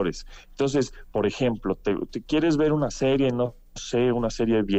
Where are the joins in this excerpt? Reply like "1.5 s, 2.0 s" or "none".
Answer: none